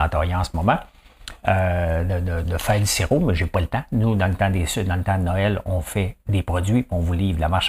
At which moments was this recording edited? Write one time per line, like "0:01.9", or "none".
0:02.4